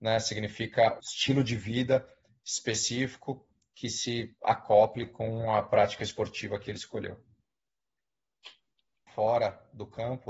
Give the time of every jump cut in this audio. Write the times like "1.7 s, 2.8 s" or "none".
1.0 s, 9.1 s